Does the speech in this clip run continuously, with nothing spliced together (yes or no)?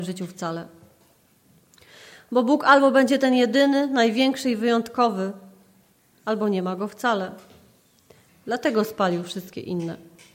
no